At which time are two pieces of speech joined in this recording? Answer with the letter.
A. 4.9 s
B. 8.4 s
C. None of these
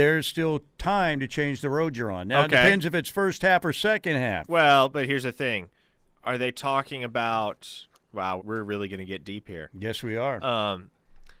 B